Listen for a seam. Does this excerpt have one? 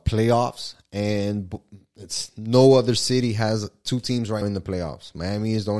yes; 1 cut; at 4.4 s

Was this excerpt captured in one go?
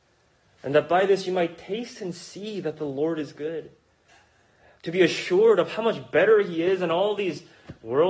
yes; 0 cuts

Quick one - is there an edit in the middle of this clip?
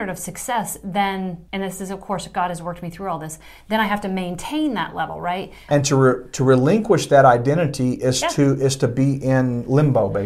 yes; 2 cuts; at 1.5 s, 5.7 s

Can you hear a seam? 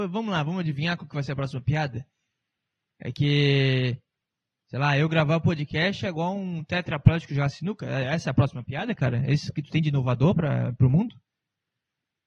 no; 0 cuts

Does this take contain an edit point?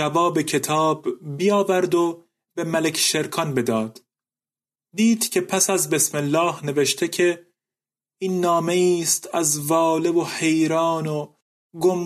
yes; 1 cut; at 4.8 s

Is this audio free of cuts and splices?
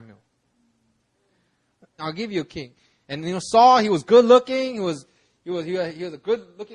no; 1 cut; at 2.0 s

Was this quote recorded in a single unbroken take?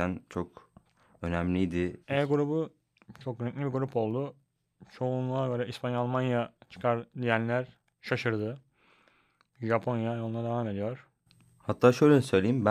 no; 1 cut; at 2.0 s

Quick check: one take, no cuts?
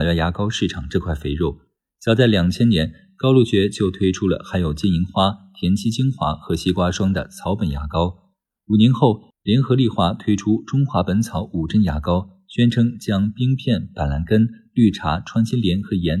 yes; 0 cuts

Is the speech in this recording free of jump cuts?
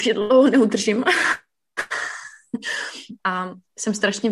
no; 1 cut; at 3.2 s

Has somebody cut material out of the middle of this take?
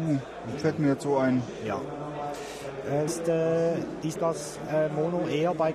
yes; 2 cuts; at 3.1 s, 4.2 s

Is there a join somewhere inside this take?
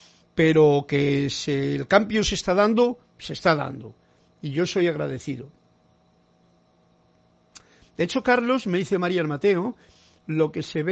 no; 0 cuts

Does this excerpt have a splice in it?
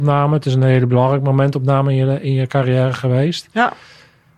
no; 0 cuts

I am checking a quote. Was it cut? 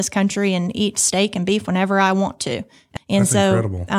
yes; 1 cut; at 3.0 s

